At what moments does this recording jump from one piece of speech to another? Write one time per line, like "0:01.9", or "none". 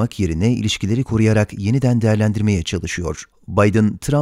0:03.3